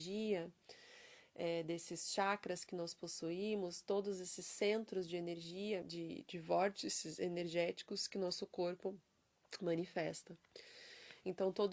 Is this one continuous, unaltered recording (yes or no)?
no